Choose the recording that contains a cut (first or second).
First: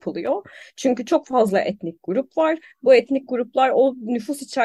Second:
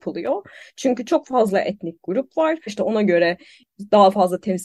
second